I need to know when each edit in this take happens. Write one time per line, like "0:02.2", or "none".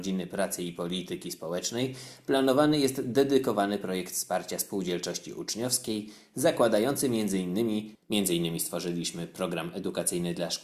0:08.0